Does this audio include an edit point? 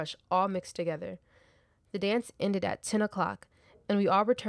no; 0 cuts

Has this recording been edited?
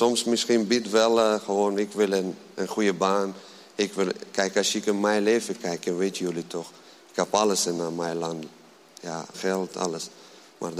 yes; 1 cut; at 9.3 s

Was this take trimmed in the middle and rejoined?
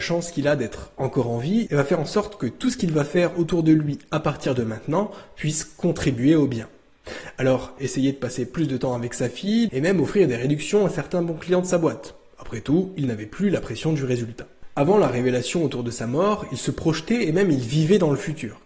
yes; 2 cuts; at 7.8 s, 9.7 s

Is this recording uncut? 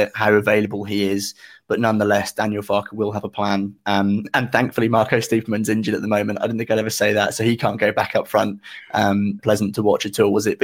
no; 1 cut; at 9.4 s

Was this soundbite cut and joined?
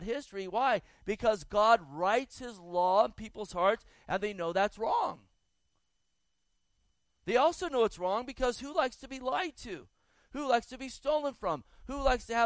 no; 0 cuts

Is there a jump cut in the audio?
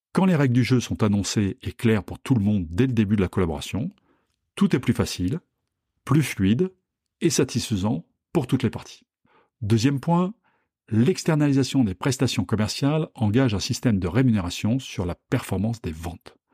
no; 0 cuts

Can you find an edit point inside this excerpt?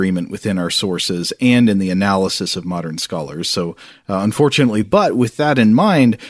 yes; 1 cut; at 4.8 s

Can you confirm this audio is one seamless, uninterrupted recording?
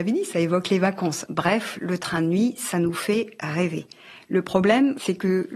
yes; 0 cuts

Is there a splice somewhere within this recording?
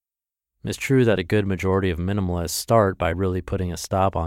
no; 0 cuts

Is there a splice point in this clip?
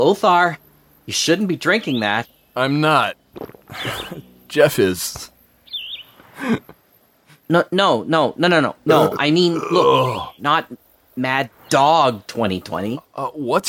yes; 2 cuts; at 10.4 s, 11.6 s

